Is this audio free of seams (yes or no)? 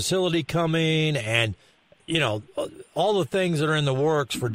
yes